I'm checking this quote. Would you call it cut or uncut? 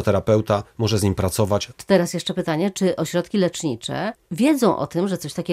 uncut